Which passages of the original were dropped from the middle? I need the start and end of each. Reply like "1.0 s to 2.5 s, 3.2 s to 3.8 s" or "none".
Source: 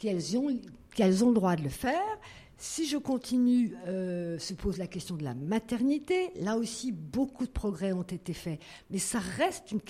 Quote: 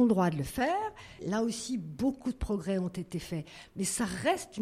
2.4 s to 6.3 s